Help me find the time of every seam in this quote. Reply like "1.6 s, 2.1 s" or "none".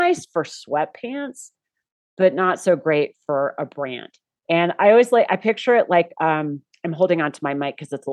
4.4 s

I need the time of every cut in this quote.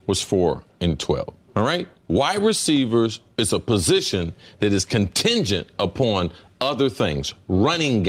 none

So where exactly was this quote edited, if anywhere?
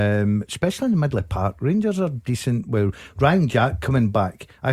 none

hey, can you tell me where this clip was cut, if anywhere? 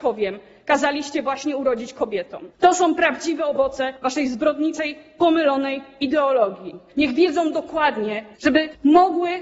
2.5 s, 6.9 s, 8.3 s

